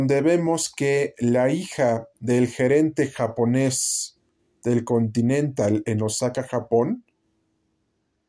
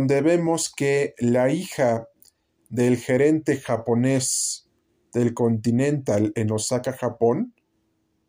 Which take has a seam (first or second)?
first